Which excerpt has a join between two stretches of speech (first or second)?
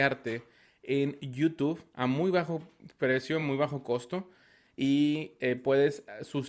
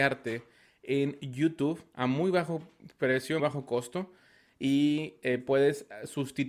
second